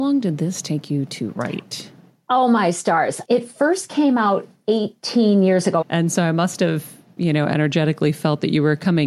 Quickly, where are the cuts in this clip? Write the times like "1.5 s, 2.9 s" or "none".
3.2 s, 5.8 s

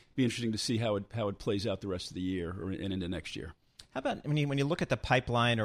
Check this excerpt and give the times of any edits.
none

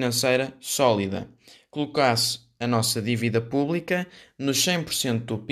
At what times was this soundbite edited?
none

